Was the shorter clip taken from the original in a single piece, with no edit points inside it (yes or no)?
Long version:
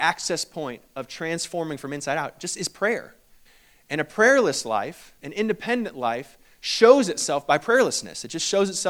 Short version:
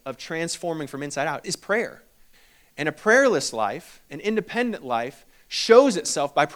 no